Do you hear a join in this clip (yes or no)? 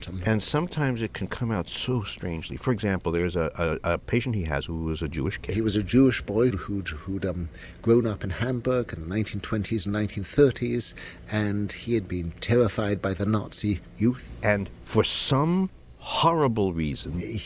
yes